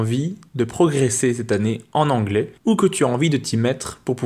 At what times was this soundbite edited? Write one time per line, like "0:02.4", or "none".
0:02.6